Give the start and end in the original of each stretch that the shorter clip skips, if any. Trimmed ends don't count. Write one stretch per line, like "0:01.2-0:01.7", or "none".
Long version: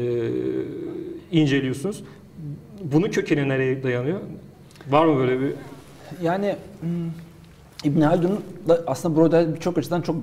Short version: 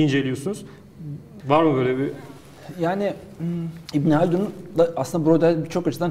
0:02.8-0:04.8
0:07.3-0:07.8